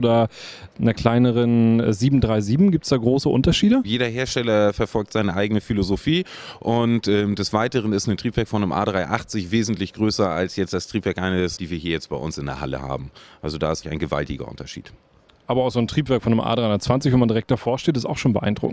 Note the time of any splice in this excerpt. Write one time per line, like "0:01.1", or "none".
0:03.8
0:11.6
0:13.8